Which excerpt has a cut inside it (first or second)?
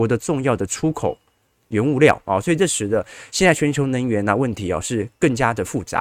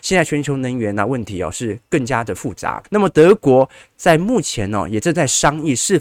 second